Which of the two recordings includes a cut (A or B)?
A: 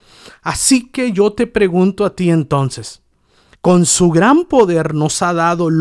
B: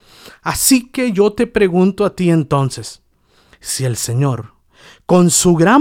A